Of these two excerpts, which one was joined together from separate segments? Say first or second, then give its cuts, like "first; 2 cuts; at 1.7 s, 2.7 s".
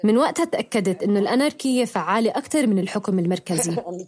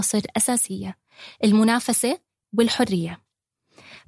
second; 1 cut; at 2.4 s